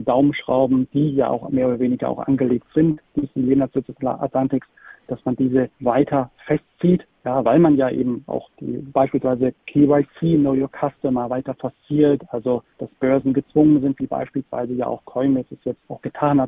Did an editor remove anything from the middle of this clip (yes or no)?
no